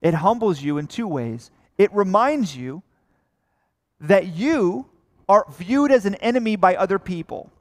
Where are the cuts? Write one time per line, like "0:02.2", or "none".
0:05.5